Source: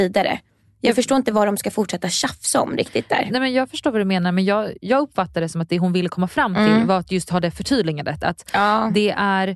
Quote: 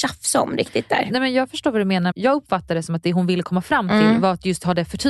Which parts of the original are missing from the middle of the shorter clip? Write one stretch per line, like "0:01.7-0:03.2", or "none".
0:04.3-0:04.8